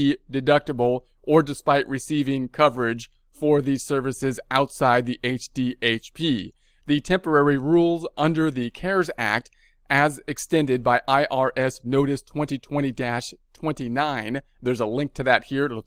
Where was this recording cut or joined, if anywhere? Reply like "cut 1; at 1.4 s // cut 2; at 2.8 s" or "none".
none